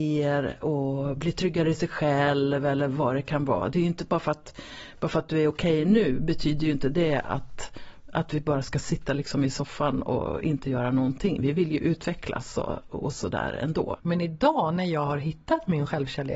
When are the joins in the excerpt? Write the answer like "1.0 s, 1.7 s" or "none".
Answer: 12.9 s, 14.0 s